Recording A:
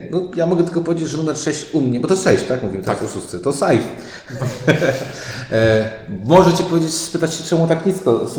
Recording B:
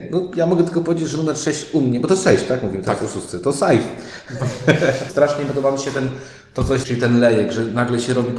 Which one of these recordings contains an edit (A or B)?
B